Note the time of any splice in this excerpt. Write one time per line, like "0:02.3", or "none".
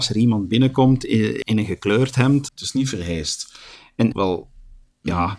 0:01.4
0:02.5
0:04.1